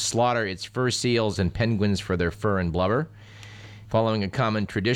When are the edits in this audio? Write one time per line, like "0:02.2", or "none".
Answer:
0:01.4
0:03.9